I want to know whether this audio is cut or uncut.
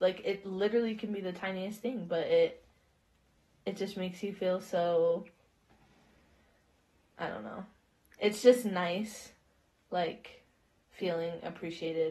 uncut